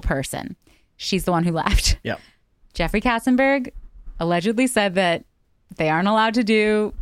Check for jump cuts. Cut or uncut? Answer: cut